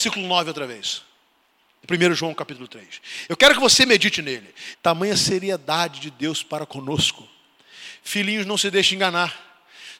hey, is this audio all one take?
no; 1 cut; at 4.7 s

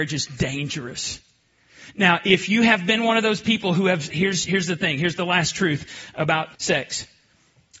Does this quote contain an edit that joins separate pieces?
yes; 2 cuts; at 4.1 s, 6.5 s

